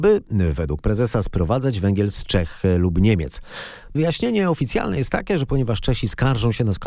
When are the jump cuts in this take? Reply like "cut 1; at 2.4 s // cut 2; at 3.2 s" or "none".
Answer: cut 1; at 3.9 s